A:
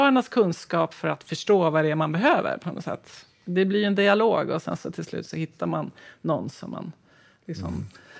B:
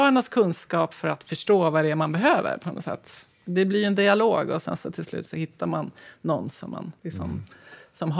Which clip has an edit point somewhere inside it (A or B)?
B